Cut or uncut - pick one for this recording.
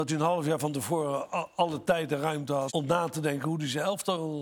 cut